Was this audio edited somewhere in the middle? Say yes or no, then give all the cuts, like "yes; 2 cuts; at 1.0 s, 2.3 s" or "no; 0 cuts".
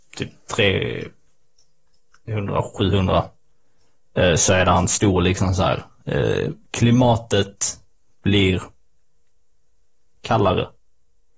no; 0 cuts